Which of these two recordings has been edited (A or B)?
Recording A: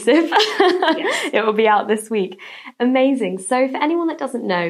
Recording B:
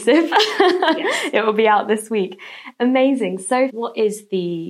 B